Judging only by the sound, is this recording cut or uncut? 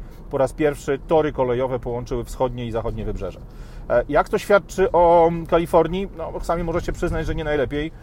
uncut